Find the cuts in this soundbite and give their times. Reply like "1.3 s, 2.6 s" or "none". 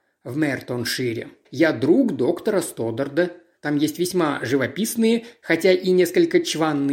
1.4 s, 3.6 s